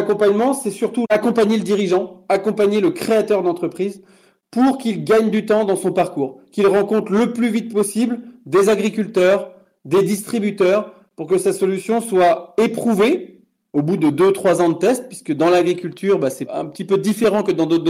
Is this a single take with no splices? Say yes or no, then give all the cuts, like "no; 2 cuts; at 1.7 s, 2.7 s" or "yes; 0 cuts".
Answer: yes; 0 cuts